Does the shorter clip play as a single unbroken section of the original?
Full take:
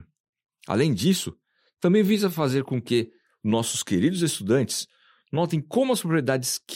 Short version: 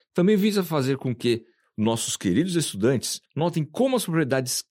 no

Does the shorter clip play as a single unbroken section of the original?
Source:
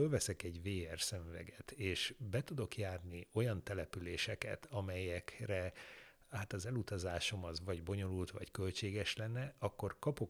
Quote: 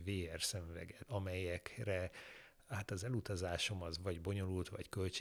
no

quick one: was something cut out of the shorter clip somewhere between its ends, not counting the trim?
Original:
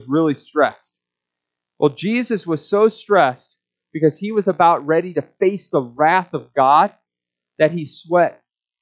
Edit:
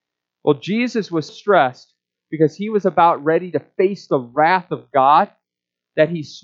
yes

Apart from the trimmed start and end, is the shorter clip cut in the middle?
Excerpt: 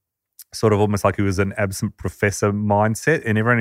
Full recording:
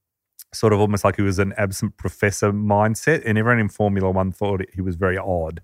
no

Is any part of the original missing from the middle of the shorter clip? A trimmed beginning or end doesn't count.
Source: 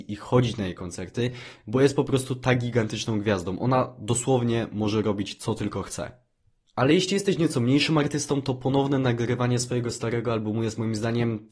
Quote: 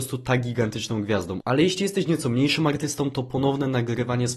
yes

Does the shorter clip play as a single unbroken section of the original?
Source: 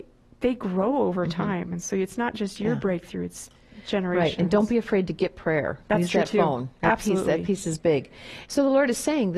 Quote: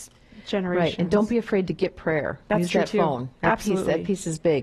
yes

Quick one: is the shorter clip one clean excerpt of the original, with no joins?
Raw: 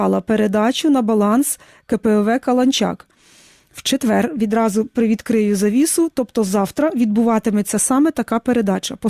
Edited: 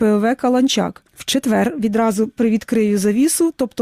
no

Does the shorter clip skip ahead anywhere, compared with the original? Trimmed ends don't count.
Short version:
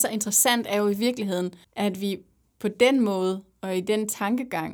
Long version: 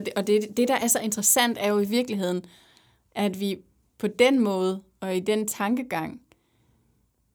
yes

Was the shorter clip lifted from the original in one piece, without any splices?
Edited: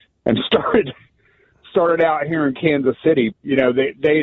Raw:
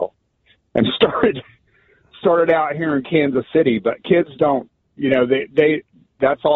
no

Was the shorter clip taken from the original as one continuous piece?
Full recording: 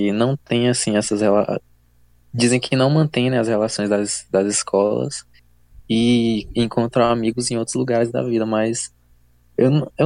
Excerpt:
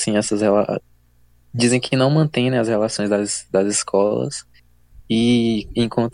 yes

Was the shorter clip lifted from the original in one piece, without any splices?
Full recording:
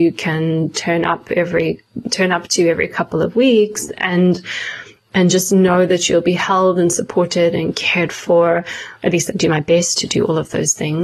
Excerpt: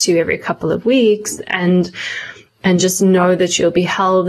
yes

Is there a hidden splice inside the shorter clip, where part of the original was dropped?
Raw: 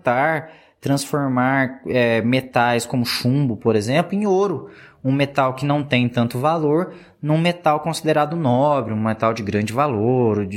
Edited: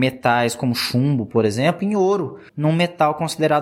yes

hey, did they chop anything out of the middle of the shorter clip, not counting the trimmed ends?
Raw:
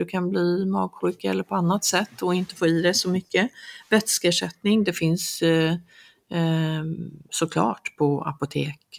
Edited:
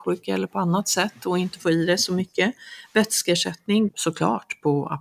yes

